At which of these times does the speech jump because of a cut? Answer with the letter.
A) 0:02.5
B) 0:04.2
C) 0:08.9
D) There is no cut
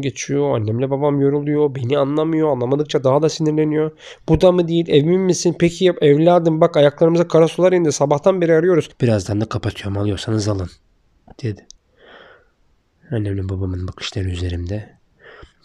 C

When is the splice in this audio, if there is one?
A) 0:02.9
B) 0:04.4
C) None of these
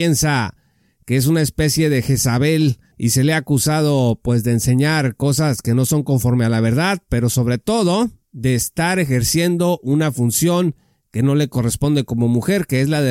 A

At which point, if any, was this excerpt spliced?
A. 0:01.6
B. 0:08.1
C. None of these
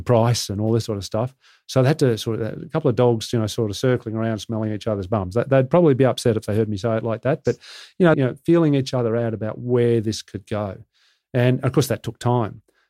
B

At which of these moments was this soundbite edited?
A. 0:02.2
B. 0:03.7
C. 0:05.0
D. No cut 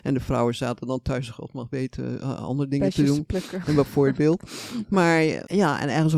D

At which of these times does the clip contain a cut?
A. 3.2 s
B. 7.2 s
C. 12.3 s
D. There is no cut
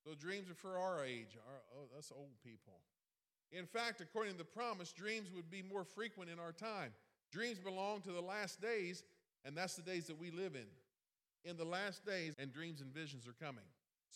C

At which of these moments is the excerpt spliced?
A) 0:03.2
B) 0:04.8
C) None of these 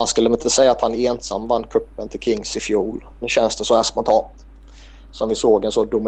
A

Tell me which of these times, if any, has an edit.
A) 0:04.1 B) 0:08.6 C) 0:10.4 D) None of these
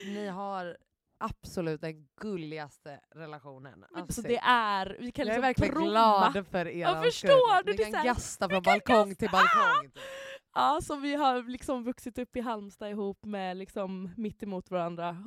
A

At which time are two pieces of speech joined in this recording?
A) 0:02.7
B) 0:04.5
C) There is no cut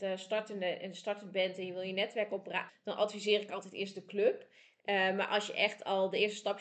A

